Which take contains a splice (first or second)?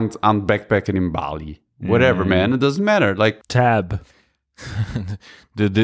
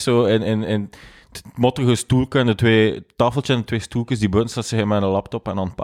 first